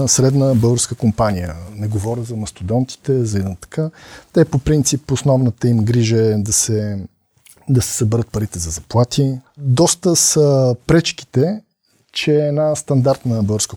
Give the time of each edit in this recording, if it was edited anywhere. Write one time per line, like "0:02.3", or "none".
0:09.4